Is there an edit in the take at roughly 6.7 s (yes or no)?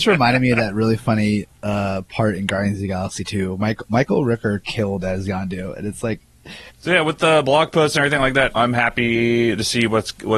yes